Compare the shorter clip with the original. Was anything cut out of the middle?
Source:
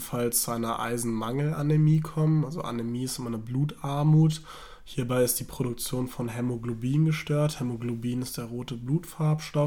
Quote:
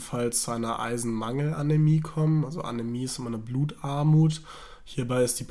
no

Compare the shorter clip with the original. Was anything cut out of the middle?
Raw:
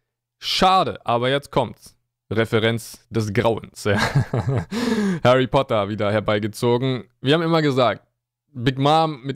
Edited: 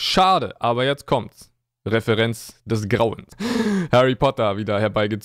yes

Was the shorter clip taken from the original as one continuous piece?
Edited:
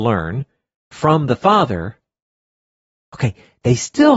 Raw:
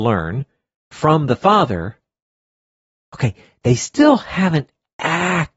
yes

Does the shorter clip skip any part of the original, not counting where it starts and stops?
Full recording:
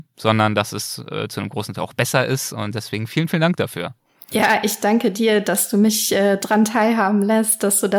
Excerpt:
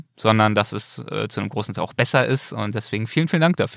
no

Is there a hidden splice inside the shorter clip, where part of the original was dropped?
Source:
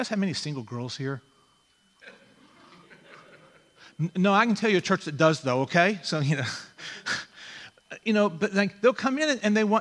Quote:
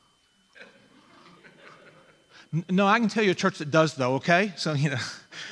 no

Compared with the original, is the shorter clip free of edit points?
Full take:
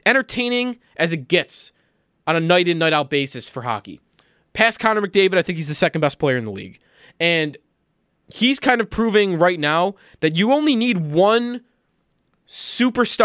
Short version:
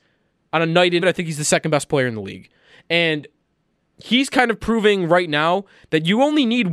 no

